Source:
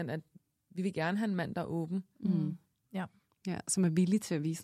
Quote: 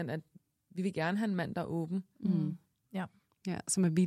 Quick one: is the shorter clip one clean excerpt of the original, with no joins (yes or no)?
yes